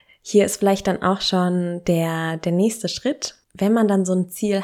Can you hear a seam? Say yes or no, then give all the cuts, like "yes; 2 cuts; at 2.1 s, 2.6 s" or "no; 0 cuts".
yes; 1 cut; at 3.4 s